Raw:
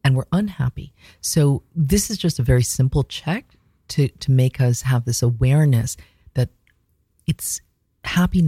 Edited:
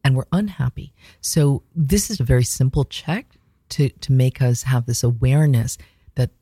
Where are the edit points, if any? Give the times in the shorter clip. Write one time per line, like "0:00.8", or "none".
0:02.2